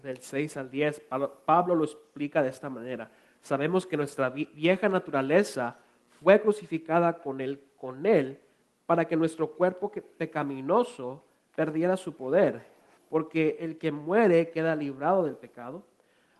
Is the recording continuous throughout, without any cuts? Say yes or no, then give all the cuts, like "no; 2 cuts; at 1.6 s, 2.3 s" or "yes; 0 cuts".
no; 1 cut; at 13.0 s